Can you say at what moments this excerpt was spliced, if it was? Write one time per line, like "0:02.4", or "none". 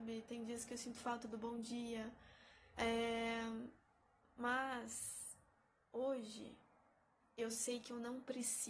0:02.7
0:07.2